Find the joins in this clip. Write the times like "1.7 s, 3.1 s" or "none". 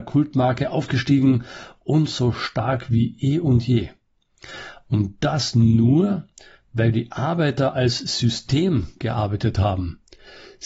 none